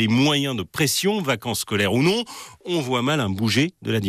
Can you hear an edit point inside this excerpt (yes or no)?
no